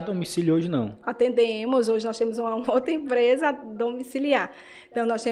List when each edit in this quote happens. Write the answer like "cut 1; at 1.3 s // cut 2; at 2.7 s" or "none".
none